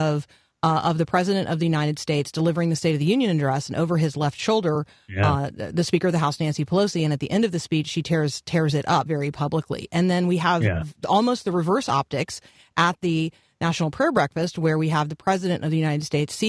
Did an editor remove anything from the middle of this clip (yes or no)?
yes